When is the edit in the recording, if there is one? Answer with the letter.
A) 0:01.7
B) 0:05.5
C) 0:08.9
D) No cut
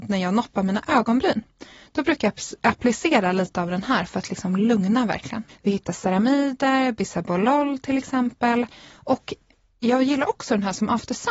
B